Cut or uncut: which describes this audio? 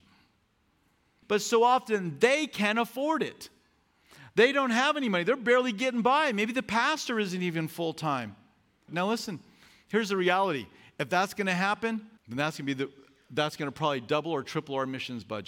cut